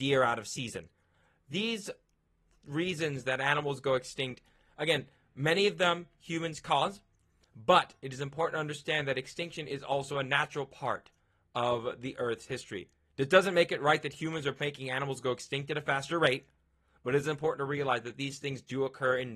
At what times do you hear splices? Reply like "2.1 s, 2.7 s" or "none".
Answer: none